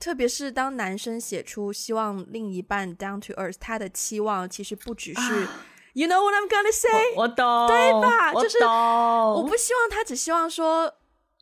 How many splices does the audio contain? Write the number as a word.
zero